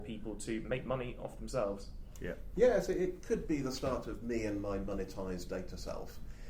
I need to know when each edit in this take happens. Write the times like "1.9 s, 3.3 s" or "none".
none